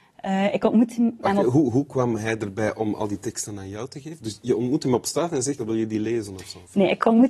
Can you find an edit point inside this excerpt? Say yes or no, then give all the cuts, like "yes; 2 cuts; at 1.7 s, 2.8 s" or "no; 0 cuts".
yes; 1 cut; at 5.6 s